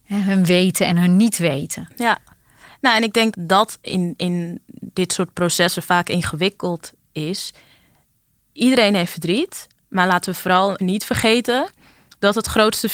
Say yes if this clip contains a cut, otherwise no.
yes